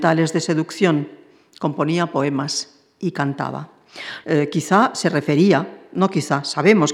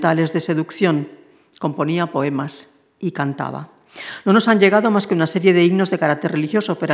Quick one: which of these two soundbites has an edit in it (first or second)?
first